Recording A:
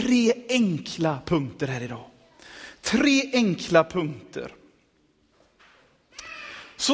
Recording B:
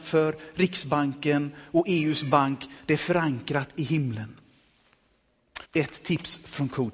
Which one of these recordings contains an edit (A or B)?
B